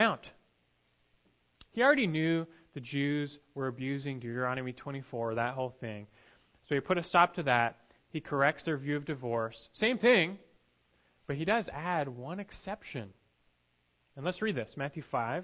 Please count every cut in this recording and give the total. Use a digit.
1